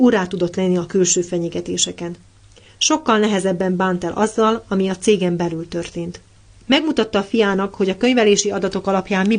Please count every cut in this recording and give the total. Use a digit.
1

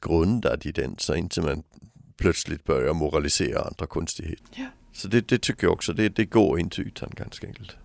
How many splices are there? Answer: 0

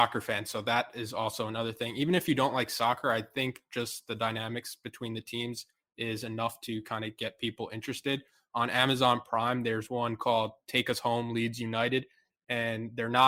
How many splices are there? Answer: 0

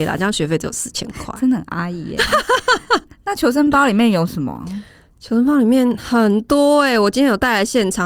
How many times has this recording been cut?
0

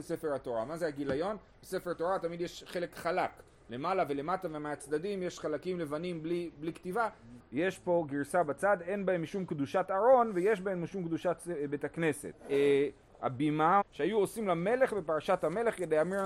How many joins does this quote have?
3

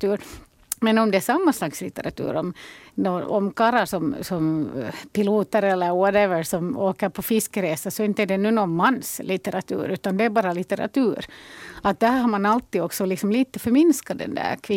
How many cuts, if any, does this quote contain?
0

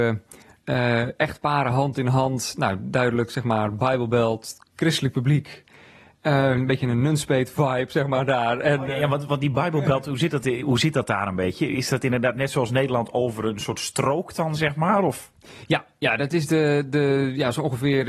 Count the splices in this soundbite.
0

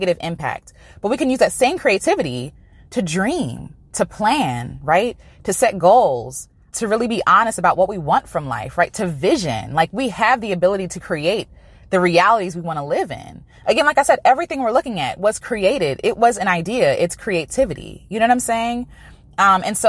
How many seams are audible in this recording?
1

